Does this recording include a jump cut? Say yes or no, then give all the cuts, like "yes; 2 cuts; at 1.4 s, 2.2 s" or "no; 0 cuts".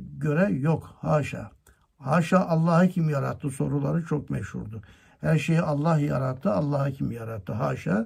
no; 0 cuts